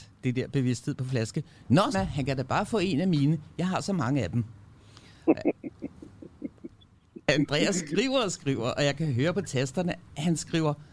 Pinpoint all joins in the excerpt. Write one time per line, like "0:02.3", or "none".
0:01.9